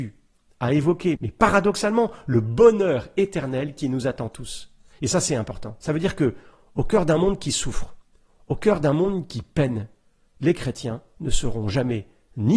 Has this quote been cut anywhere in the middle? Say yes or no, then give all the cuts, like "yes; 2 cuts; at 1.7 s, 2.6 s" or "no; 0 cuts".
yes; 1 cut; at 1.1 s